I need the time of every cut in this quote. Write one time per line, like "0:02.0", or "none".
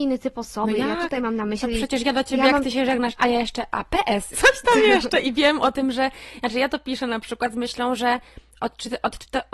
0:04.3